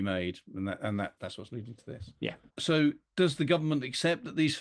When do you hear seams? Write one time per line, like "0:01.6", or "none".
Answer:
0:02.5

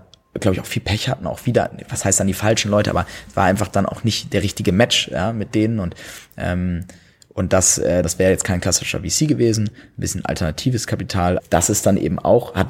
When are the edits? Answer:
0:08.0
0:11.4

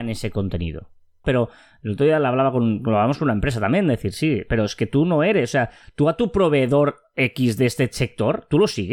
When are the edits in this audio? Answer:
0:01.2

